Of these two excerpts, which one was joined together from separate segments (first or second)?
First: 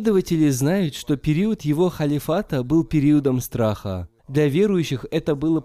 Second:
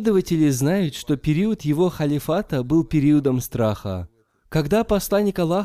first